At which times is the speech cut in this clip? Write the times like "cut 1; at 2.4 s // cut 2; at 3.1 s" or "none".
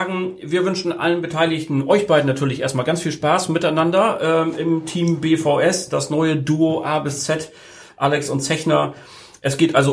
none